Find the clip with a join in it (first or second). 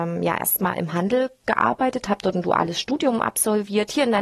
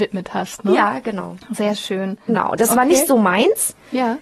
second